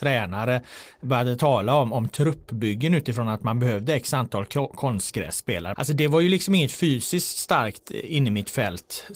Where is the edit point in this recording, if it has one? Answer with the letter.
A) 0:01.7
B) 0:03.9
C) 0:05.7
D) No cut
C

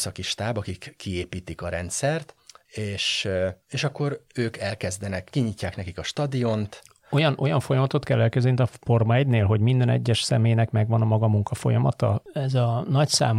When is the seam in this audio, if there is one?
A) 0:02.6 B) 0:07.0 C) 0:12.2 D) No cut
C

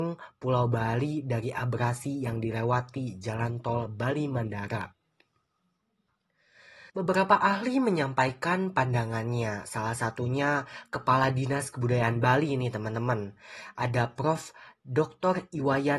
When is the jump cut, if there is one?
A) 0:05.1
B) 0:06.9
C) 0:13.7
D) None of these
B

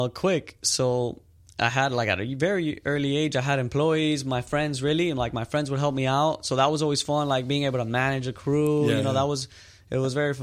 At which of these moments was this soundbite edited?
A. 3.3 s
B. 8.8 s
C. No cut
C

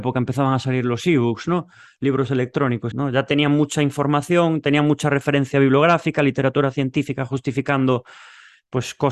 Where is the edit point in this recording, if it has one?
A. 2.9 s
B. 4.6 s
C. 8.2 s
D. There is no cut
A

